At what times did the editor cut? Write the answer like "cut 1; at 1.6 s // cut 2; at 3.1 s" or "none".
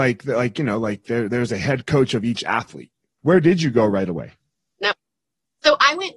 cut 1; at 3.2 s

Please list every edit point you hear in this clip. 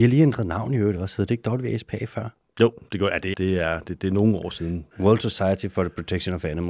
cut 1; at 3.3 s // cut 2; at 4.9 s

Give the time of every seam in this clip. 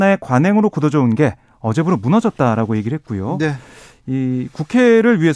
none

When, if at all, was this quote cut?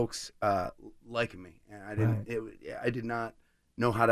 none

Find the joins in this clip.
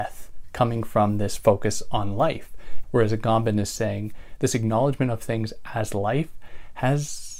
cut 1; at 2.8 s // cut 2; at 4.4 s

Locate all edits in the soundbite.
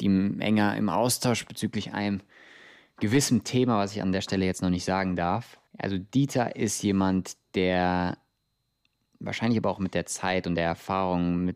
cut 1; at 5.7 s

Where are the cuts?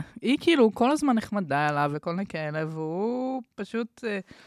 cut 1; at 1.9 s

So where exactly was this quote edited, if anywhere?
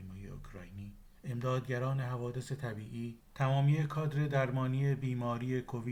cut 1; at 3.3 s

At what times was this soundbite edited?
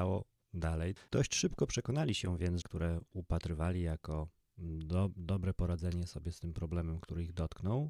cut 1; at 1.1 s // cut 2; at 2.6 s

